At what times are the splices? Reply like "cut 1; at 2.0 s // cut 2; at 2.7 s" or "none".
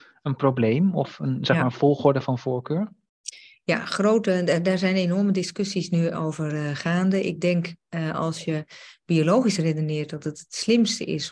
none